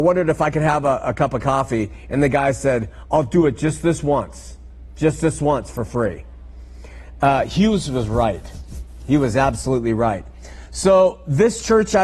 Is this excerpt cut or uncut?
uncut